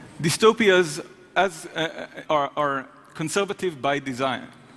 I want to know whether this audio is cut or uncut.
cut